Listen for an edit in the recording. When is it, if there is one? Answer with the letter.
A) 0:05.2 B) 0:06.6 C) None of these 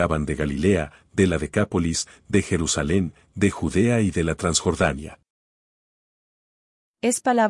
C